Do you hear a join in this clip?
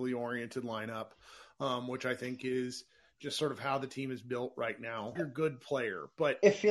yes; 1 cut; at 5.2 s

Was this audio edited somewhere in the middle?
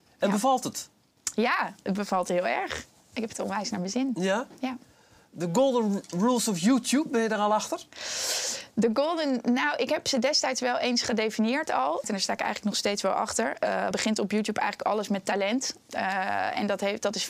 yes; 2 cuts; at 12.0 s, 13.9 s

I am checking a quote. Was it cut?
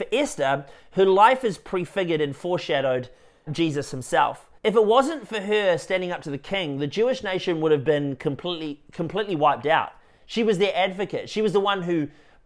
yes; 2 cuts; at 3.5 s, 4.6 s

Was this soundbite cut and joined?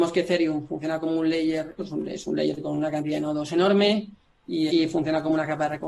yes; 2 cuts; at 1.8 s, 4.7 s

